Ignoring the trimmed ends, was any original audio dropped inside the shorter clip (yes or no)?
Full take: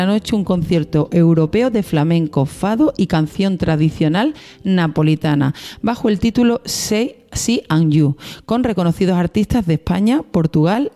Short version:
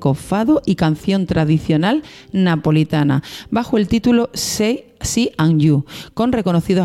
no